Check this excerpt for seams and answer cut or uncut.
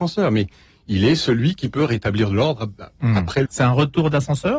cut